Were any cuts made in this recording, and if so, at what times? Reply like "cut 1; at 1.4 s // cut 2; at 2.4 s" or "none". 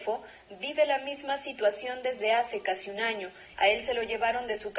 cut 1; at 3.5 s